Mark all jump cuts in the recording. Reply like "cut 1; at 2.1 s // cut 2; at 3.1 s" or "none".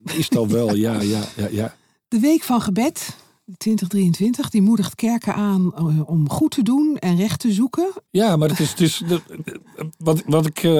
cut 1; at 1.0 s // cut 2; at 8.0 s

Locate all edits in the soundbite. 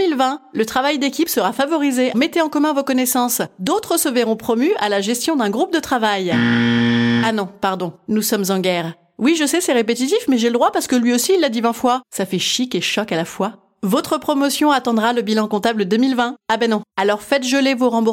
cut 1; at 2.1 s

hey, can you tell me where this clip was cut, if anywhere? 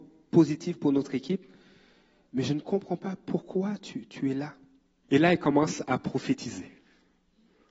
cut 1; at 5.0 s

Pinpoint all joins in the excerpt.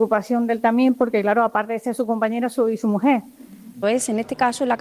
cut 1; at 3.8 s

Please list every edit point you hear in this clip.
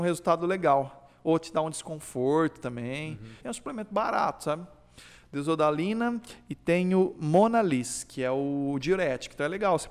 cut 1; at 3.4 s

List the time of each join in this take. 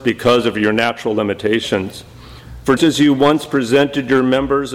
cut 1; at 2.8 s

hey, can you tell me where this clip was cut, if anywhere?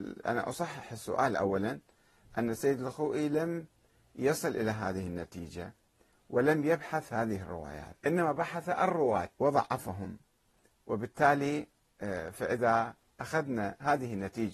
cut 1; at 8.0 s // cut 2; at 9.3 s

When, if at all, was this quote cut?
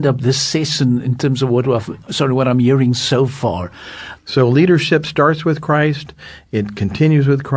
cut 1; at 4.2 s

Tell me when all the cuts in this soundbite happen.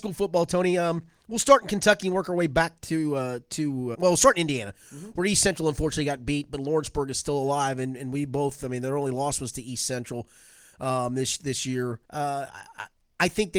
cut 1; at 3.9 s // cut 2; at 12.0 s

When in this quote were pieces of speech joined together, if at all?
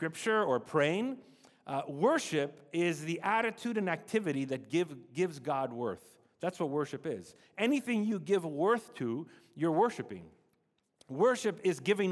none

